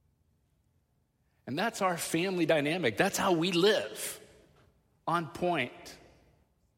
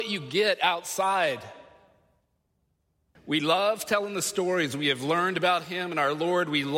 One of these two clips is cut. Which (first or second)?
second